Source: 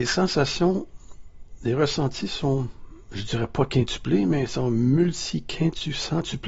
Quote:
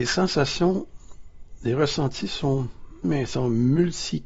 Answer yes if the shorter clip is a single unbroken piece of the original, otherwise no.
no